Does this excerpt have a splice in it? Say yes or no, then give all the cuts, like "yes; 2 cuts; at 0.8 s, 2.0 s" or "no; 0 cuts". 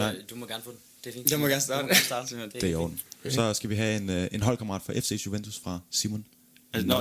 no; 0 cuts